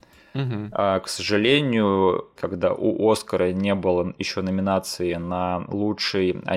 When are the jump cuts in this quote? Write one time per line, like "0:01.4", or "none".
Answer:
0:02.4